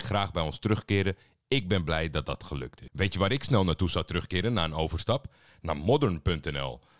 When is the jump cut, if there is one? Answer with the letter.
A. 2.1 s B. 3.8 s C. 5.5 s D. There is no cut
D